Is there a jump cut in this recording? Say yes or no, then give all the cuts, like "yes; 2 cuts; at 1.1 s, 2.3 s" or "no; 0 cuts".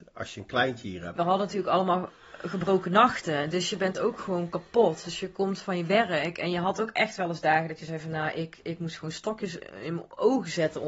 yes; 1 cut; at 1.2 s